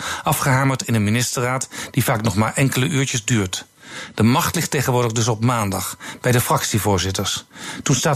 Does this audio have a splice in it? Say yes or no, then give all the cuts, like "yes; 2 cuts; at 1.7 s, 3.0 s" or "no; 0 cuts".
no; 0 cuts